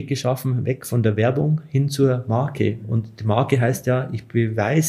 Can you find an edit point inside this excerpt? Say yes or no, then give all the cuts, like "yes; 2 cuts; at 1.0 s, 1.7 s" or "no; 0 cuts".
no; 0 cuts